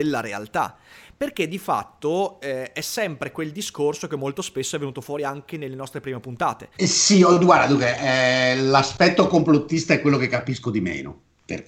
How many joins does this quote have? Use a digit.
1